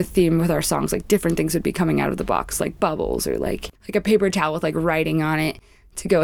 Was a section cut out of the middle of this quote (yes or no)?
yes